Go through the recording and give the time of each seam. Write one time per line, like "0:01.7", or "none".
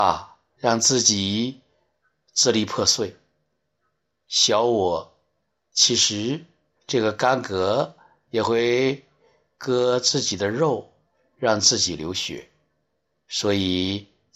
0:06.8